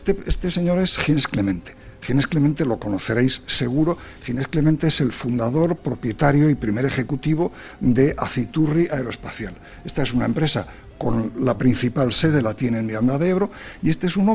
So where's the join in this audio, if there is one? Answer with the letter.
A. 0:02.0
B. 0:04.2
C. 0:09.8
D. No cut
D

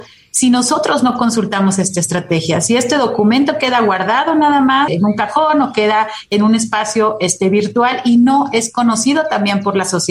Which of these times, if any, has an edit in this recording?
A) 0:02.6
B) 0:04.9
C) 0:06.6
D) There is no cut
B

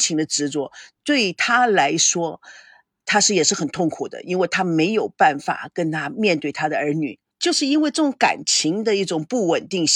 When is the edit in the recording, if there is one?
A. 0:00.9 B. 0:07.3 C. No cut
B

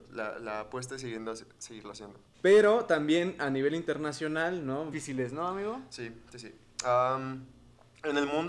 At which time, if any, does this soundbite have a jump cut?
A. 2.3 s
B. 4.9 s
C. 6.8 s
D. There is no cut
B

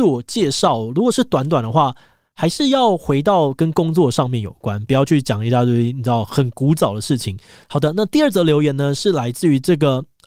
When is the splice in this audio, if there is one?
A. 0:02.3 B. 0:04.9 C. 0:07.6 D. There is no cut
C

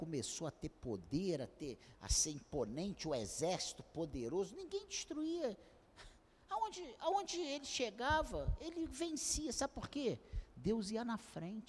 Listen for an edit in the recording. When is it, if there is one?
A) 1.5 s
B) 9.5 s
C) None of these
C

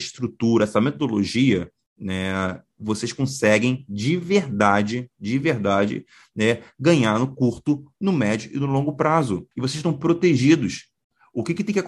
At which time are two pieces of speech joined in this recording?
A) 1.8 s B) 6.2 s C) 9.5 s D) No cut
C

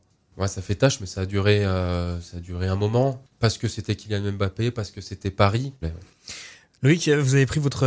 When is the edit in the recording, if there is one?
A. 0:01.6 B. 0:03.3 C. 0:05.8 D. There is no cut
C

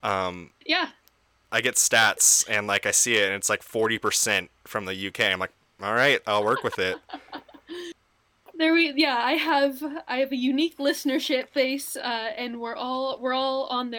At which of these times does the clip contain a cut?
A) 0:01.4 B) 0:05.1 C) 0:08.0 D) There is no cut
D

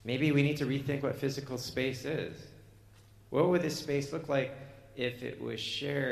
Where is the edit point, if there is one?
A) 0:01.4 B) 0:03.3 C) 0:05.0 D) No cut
B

